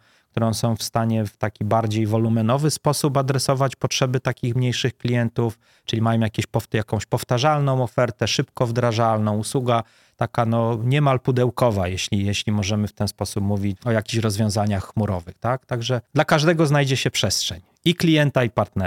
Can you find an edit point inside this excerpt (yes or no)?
yes